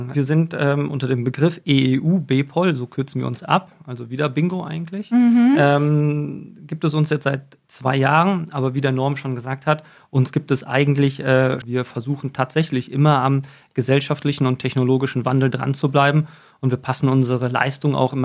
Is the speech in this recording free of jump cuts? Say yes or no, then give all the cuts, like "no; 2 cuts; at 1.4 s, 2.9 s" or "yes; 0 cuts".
no; 1 cut; at 11.6 s